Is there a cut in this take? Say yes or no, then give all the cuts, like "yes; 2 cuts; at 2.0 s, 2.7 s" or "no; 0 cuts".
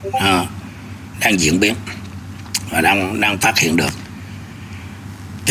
yes; 1 cut; at 1.1 s